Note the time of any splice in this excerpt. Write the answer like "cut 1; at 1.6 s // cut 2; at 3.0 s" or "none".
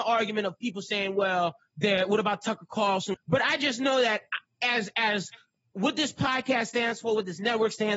cut 1; at 3.1 s